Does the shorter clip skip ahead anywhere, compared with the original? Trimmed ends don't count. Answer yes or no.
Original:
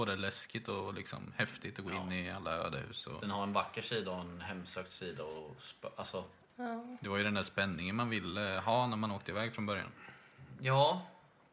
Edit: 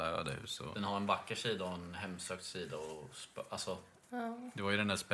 no